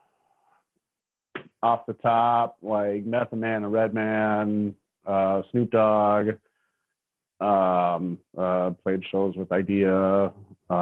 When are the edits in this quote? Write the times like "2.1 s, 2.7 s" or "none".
8.3 s